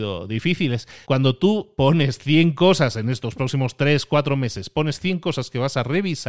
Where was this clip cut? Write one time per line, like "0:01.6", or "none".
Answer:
0:01.0

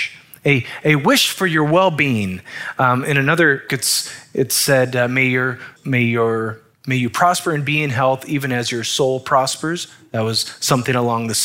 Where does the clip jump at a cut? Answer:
0:03.7
0:05.8

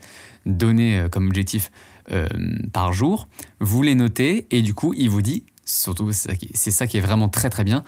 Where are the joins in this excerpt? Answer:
none

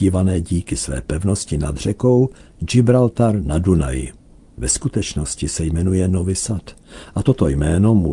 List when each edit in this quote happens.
none

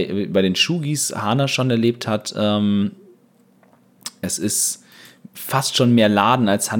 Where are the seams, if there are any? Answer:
none

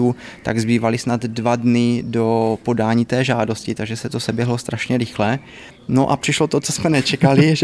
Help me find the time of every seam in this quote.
0:05.7

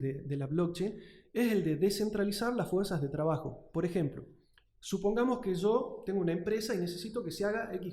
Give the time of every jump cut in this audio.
none

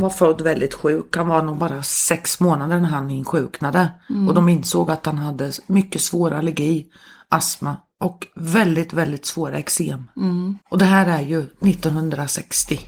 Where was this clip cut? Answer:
0:10.6

